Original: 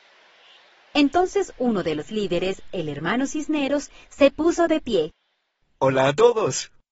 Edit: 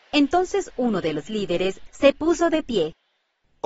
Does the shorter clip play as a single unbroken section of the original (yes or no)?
no